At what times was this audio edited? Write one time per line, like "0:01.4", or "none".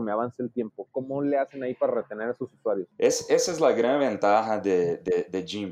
none

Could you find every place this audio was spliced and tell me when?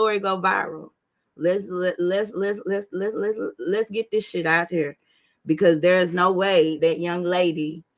0:06.8

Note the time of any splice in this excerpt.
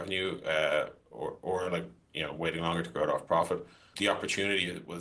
0:03.9

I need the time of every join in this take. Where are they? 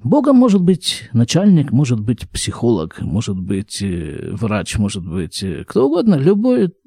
none

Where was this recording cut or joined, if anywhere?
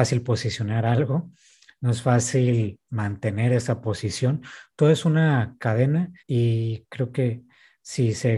0:06.2

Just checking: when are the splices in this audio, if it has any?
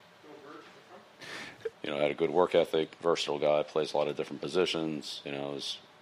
0:01.7
0:03.0

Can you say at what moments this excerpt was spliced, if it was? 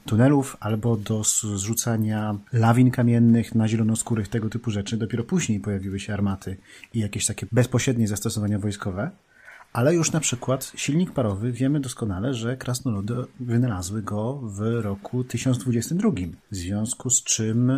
0:16.4

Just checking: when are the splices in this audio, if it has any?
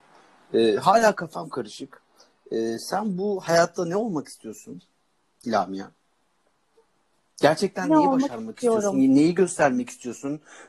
none

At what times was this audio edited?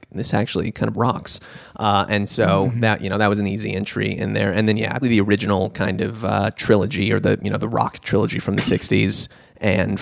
0:05.0

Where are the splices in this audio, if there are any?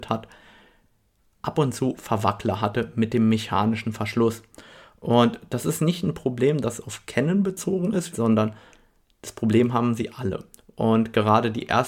0:08.1

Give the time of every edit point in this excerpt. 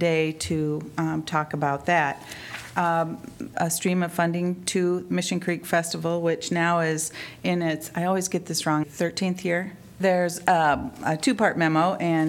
0:03.5
0:08.8
0:10.0

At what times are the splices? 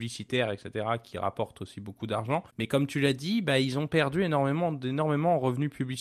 0:02.5

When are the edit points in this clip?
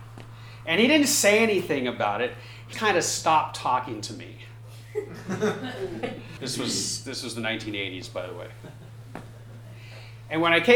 0:02.7
0:06.4

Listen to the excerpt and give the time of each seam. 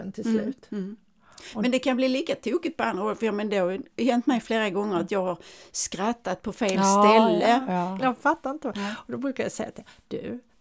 0:08.0

